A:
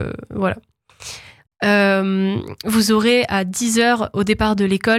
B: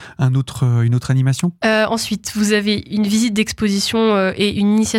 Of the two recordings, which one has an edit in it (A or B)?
A